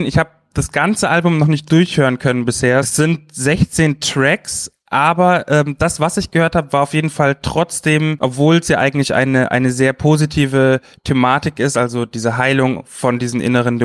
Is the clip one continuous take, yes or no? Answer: yes